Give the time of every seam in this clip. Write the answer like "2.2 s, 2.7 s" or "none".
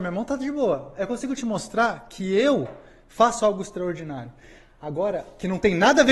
none